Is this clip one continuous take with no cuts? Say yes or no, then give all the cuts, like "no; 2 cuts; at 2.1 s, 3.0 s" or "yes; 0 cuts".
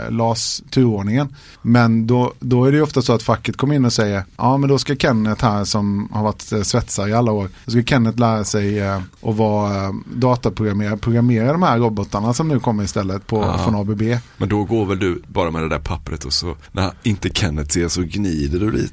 yes; 0 cuts